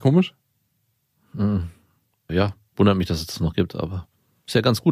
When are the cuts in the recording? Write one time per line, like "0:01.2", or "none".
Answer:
none